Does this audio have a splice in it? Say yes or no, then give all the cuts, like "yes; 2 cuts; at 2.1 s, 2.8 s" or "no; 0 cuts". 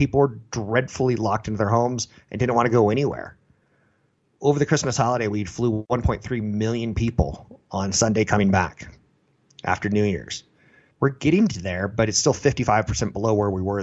yes; 1 cut; at 10.9 s